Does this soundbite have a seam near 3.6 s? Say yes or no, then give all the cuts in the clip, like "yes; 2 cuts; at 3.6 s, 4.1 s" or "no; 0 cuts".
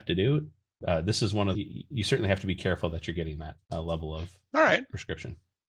yes; 2 cuts; at 1.5 s, 3.6 s